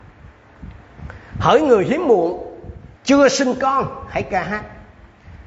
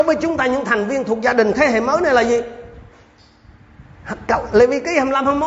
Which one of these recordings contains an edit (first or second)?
first